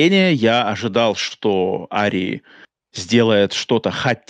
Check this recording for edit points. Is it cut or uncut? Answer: uncut